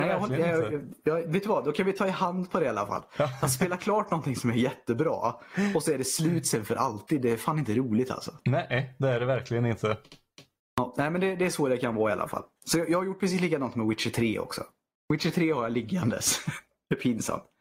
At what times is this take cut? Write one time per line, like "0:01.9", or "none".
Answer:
none